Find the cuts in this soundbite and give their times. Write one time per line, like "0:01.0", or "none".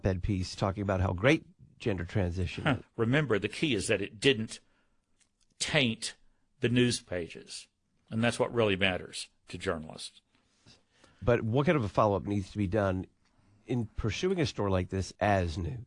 0:02.8
0:10.7